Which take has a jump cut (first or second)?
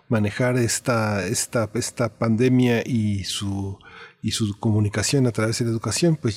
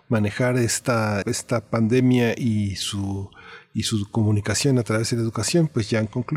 second